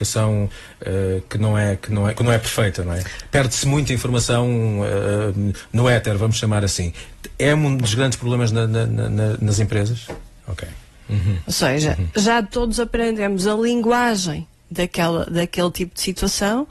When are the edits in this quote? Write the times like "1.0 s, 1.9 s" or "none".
10.4 s